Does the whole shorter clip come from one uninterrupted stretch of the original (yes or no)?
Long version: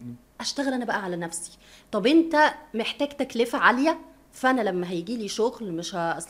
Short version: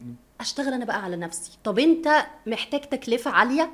no